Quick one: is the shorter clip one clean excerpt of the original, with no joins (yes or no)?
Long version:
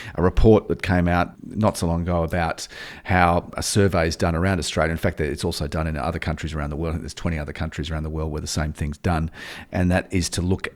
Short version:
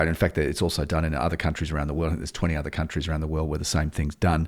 yes